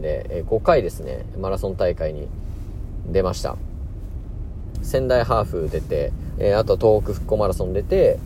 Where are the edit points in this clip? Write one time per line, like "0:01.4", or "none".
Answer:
0:04.7
0:06.3